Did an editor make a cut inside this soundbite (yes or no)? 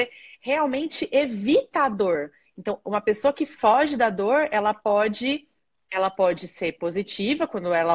no